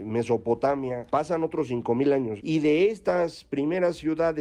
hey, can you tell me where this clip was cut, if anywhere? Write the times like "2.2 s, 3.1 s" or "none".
2.4 s